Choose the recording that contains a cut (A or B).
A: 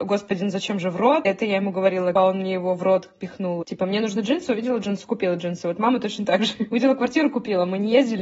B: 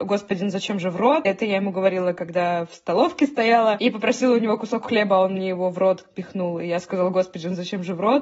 A